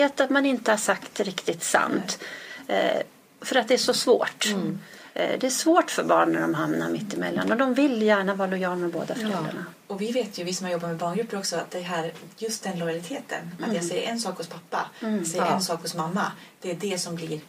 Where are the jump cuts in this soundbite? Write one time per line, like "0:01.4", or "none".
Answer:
none